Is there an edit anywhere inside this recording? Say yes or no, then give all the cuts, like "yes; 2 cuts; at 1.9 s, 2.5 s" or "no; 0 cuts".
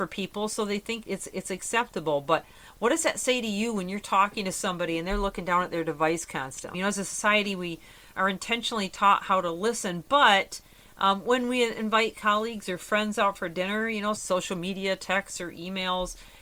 yes; 3 cuts; at 1.0 s, 6.7 s, 14.2 s